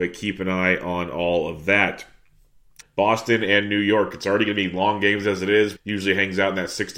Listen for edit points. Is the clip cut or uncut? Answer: cut